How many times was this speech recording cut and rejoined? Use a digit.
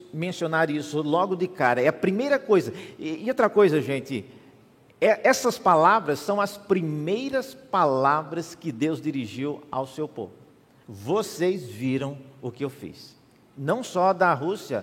1